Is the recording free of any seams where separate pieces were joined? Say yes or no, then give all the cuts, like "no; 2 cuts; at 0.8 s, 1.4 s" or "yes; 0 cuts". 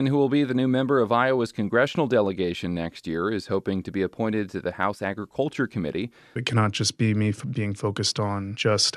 no; 1 cut; at 6.4 s